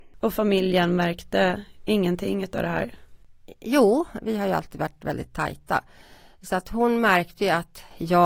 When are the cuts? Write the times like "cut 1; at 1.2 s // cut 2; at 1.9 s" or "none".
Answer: cut 1; at 4.2 s